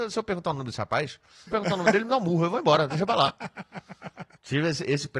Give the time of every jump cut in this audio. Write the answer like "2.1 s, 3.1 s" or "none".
1.5 s